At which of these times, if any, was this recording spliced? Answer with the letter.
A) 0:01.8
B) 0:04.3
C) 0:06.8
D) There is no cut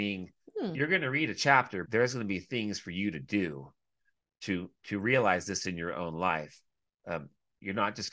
A